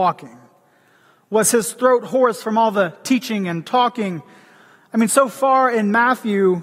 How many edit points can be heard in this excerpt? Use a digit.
0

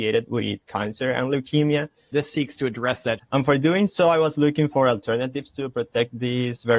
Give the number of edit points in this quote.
2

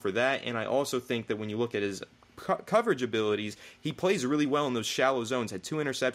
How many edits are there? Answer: 0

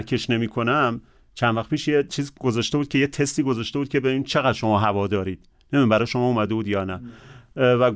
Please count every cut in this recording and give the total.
1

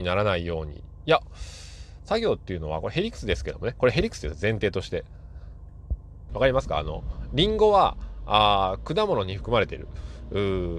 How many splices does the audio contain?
1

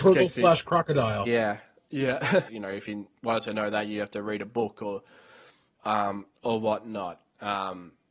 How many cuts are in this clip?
2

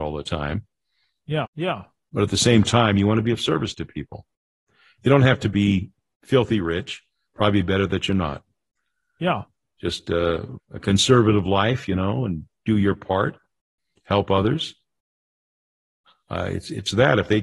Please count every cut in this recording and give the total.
2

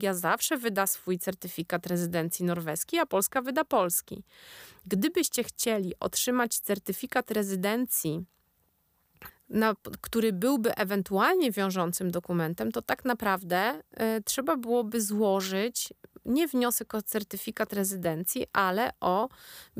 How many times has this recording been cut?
1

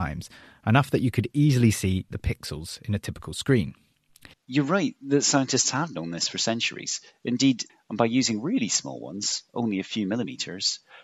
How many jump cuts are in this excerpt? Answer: 2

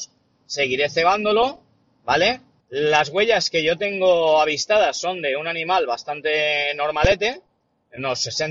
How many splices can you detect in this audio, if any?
1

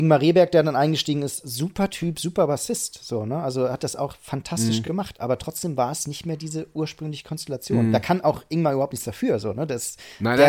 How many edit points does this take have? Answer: 0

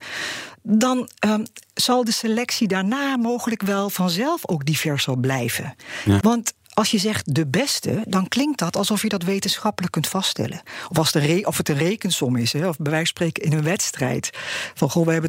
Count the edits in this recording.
1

